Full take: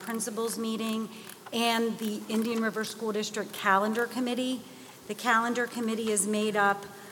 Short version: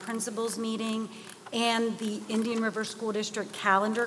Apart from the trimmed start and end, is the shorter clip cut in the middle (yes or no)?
no